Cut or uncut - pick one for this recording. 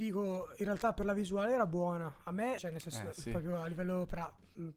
cut